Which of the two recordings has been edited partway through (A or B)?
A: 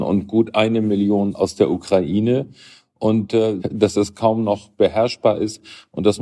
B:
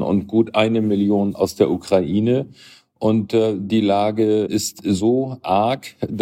A